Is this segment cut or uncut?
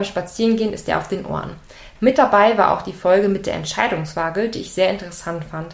cut